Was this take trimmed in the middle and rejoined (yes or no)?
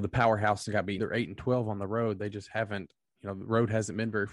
yes